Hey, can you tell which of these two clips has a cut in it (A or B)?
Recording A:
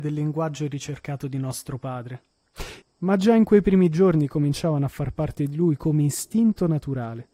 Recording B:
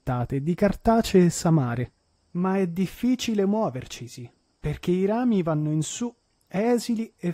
A